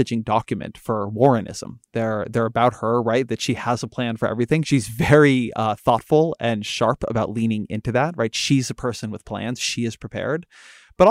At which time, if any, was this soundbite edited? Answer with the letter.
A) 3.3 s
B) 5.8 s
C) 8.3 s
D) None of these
D